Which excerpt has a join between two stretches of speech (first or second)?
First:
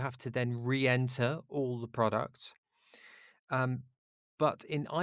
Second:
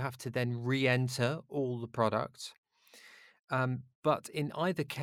second